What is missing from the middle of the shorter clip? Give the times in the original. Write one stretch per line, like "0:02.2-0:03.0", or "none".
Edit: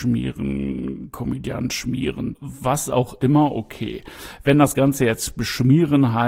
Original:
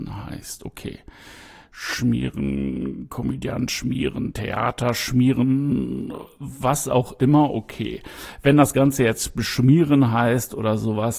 0:04.3-0:06.3